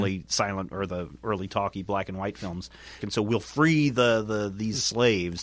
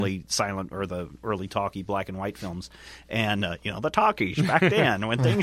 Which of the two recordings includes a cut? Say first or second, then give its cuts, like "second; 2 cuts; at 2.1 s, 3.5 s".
first; 1 cut; at 3.0 s